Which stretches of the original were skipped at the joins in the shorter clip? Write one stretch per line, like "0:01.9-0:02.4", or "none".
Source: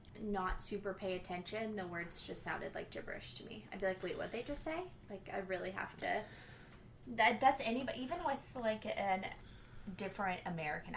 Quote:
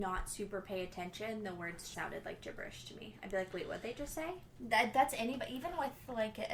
0:02.3-0:02.4
0:05.0-0:07.0